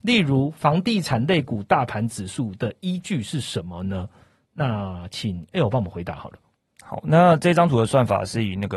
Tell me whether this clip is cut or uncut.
uncut